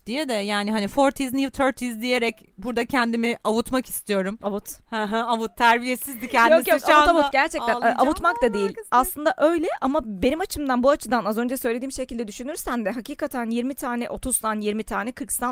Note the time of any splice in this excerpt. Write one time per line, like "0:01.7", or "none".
none